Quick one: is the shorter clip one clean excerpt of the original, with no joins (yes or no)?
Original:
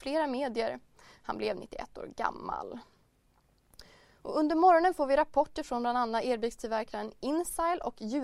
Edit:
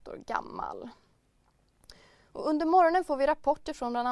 yes